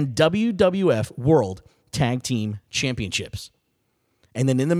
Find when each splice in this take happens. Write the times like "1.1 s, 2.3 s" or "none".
none